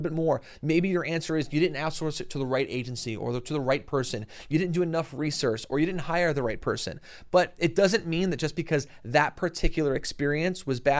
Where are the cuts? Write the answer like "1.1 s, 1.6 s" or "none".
none